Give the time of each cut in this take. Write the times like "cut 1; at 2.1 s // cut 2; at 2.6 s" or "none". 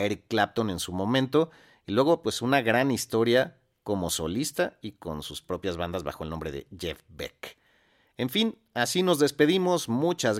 none